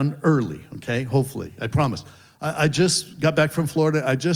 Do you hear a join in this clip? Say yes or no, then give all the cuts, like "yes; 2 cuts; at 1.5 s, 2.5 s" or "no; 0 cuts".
no; 0 cuts